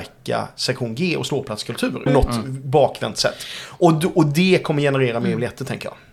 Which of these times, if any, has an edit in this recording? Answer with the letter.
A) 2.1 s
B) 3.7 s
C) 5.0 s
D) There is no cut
A